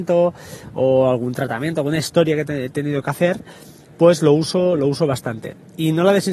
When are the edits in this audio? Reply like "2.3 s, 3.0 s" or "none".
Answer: none